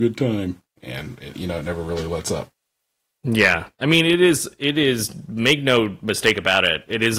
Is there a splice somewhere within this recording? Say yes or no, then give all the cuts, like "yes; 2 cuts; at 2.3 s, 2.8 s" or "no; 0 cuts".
no; 0 cuts